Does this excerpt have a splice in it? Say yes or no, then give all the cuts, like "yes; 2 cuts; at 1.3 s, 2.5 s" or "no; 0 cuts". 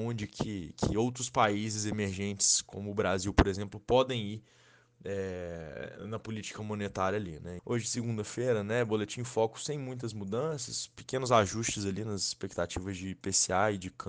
yes; 1 cut; at 7.6 s